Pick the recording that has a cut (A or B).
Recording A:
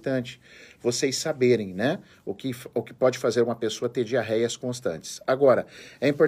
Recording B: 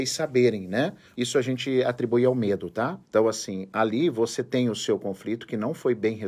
B